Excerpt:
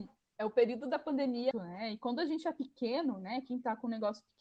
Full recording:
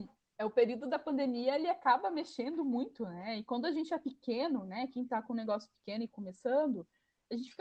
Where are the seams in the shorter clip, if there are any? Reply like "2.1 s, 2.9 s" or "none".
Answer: 1.5 s